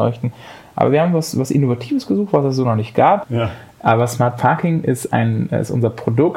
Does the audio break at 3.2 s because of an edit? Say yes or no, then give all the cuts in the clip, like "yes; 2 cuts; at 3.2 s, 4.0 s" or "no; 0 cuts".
yes; 1 cut; at 3.2 s